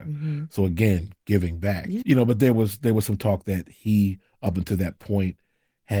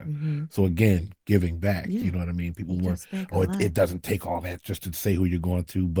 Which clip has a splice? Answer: first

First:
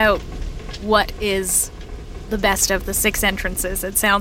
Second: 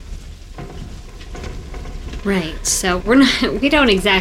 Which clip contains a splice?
second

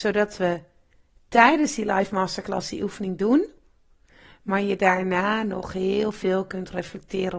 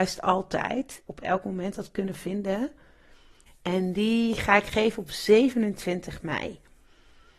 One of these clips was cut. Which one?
second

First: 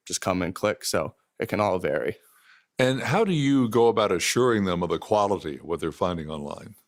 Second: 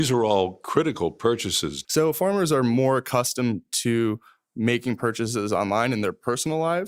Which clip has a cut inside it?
second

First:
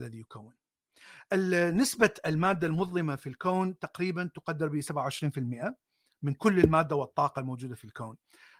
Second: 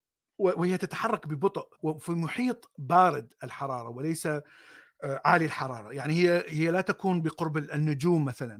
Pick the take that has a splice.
second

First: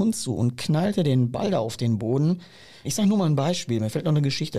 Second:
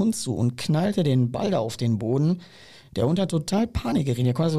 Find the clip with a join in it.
first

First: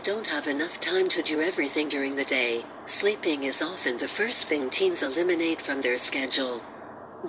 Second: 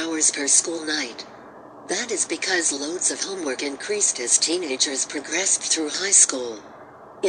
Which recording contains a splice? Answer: second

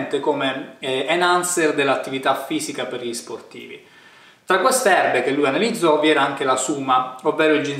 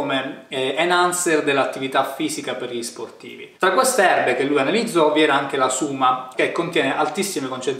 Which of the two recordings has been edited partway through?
second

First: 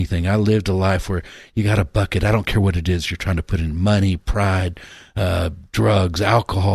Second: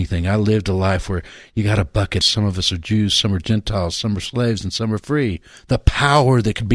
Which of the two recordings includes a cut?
second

